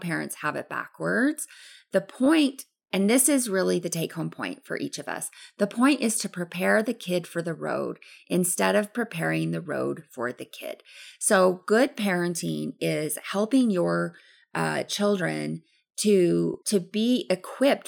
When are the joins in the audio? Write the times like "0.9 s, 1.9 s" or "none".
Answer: 16.6 s